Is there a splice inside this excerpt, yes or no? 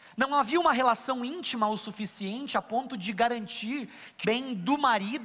yes